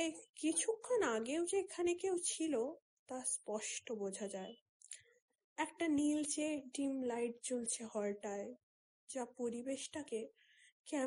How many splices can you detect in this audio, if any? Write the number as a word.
zero